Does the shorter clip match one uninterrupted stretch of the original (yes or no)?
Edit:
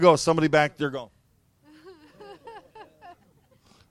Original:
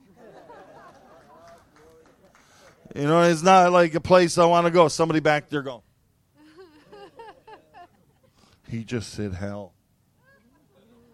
yes